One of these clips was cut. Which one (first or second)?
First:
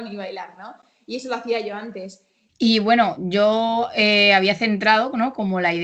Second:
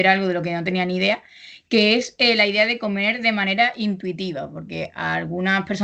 first